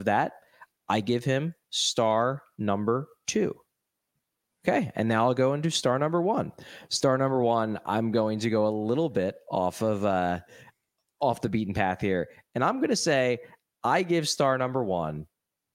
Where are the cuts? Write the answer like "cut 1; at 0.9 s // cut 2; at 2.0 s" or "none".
cut 1; at 4.5 s